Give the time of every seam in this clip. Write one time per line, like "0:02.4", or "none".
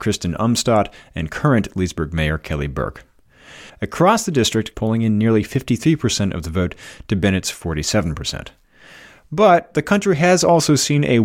0:03.7
0:04.7